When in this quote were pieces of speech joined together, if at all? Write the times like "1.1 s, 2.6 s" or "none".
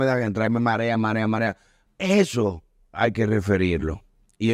1.9 s